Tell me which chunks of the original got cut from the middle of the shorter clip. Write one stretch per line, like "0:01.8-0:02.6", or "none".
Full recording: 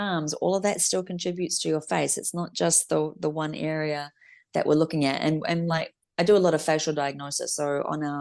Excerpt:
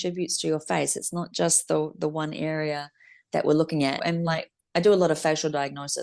0:05.2-0:05.4